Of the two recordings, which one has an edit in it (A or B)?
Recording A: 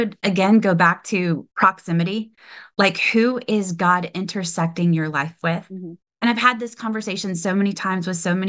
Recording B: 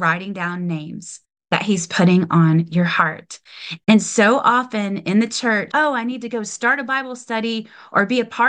B